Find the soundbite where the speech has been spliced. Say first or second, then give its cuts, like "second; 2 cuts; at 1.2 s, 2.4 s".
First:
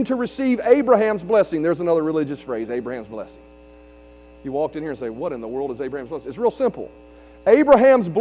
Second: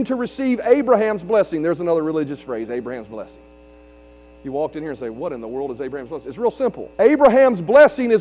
second; 1 cut; at 6.9 s